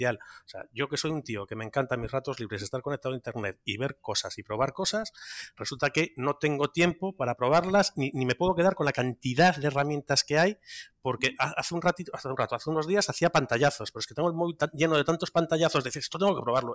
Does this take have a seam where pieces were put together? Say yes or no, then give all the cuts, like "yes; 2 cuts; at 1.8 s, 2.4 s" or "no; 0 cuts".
no; 0 cuts